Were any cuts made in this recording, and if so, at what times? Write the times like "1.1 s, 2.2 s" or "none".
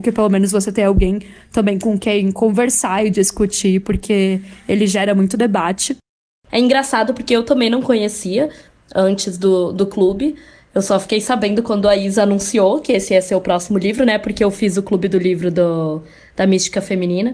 none

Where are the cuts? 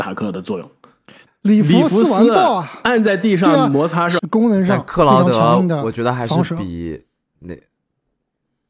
1.3 s, 4.2 s

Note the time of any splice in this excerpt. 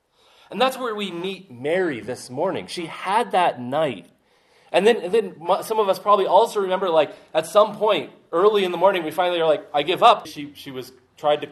10.3 s

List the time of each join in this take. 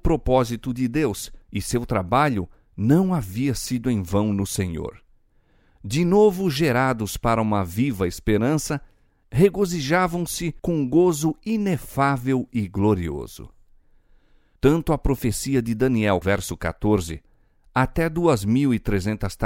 16.2 s

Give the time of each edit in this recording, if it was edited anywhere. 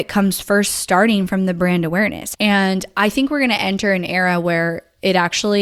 2.3 s

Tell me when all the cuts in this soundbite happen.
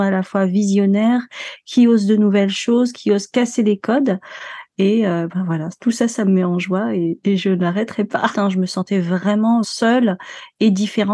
8.3 s, 9.6 s

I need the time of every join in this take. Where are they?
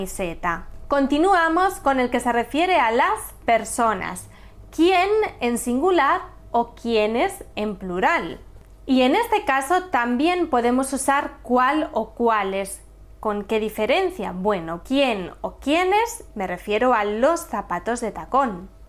14.8 s, 16.3 s

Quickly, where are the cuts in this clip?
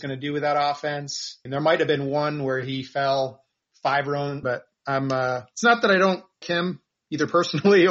1.5 s, 4.4 s, 6.4 s

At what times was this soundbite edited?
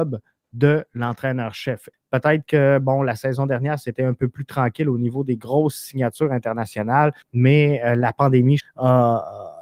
1.9 s, 7.2 s, 8.6 s

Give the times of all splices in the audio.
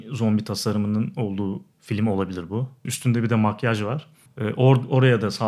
2.8 s, 4.3 s

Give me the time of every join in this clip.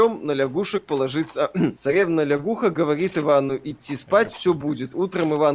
1.8 s

